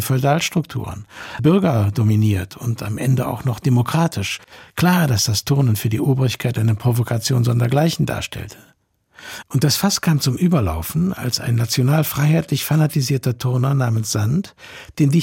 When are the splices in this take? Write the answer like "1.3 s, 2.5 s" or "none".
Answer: 1.4 s